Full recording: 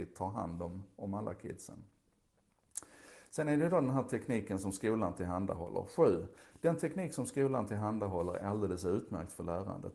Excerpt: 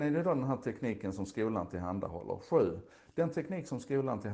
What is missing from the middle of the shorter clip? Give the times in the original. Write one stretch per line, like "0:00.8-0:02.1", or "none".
none